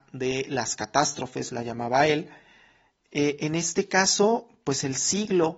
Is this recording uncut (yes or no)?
yes